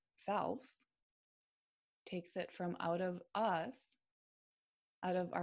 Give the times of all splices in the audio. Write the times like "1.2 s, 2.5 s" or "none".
none